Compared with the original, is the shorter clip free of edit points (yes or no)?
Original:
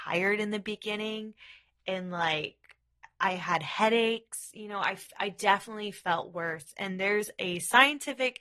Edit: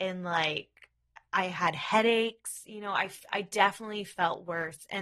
yes